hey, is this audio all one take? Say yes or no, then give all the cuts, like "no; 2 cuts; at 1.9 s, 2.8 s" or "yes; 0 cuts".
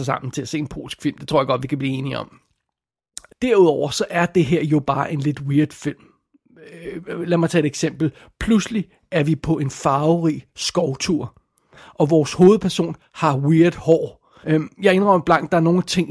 no; 2 cuts; at 3.3 s, 14.4 s